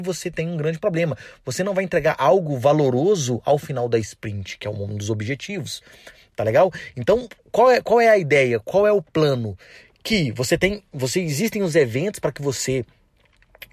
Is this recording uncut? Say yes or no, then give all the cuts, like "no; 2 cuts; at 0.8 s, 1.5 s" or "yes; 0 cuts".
yes; 0 cuts